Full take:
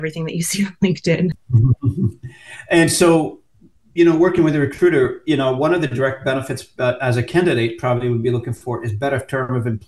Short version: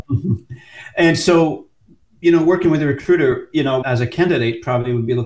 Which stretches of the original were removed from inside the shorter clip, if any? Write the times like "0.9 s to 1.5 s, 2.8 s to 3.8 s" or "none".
5.6 s to 7.0 s